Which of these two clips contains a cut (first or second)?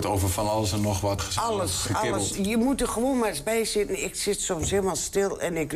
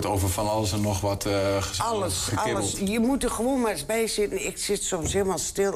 first